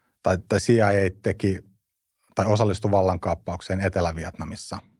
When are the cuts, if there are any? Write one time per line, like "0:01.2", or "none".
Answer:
none